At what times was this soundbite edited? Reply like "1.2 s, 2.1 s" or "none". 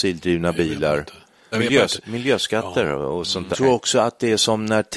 1.5 s, 3.5 s